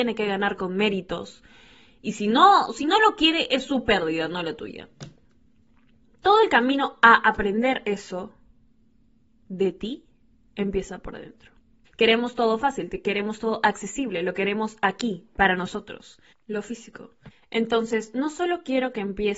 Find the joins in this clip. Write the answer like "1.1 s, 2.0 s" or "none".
11.8 s, 16.3 s